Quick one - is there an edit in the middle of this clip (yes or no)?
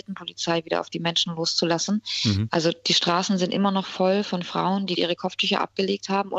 yes